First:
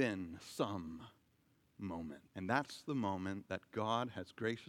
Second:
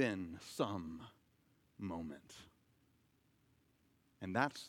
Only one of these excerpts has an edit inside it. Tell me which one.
first; 1 cut; at 2.3 s

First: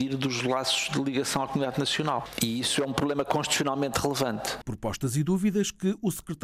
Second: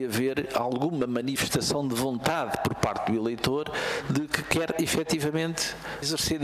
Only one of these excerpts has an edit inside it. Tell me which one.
first; 1 cut; at 4.6 s

